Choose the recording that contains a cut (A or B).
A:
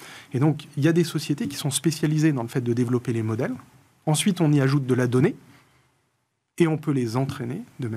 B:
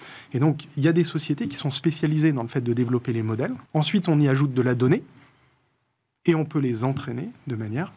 B